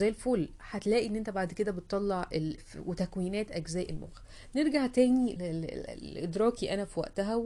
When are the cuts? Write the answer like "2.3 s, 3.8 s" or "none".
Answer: 2.6 s, 5.4 s